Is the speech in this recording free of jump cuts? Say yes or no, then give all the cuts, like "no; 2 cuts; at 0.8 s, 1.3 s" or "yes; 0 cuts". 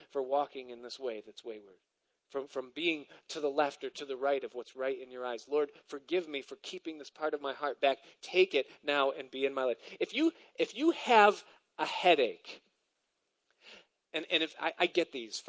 yes; 0 cuts